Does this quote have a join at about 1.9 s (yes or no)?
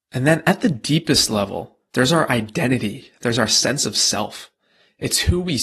yes